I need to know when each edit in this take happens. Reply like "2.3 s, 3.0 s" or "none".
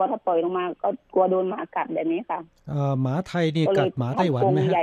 none